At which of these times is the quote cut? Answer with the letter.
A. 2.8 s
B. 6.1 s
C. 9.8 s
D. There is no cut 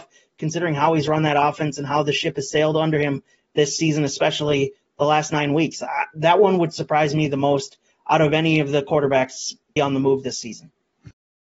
C